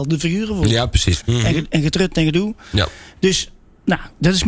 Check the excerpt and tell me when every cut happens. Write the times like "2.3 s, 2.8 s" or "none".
1.2 s

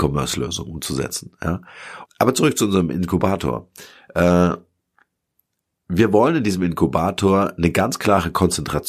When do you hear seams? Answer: 2.1 s

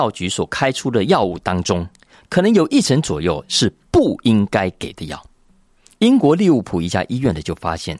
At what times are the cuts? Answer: 6.0 s

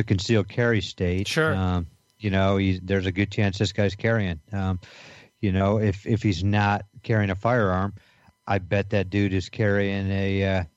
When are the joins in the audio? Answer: none

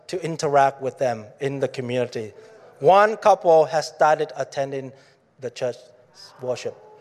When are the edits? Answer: none

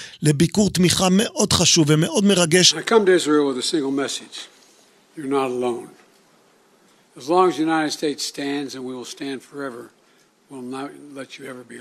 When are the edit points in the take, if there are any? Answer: 7.0 s

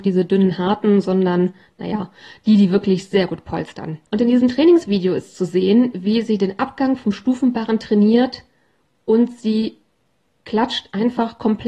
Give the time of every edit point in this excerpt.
4.1 s

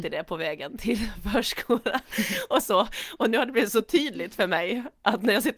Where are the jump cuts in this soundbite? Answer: none

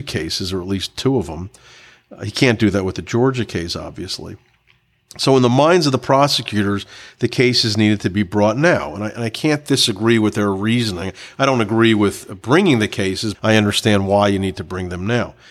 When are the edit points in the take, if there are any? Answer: 13.3 s

